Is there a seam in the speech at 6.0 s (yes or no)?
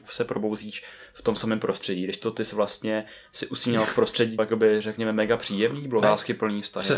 yes